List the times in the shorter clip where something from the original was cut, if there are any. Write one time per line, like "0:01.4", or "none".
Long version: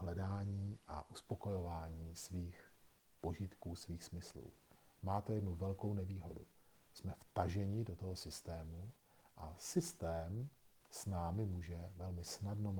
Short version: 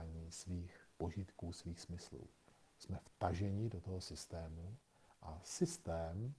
0:00.9
0:02.7